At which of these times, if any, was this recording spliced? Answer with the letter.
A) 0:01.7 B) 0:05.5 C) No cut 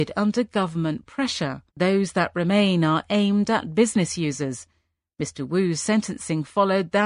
A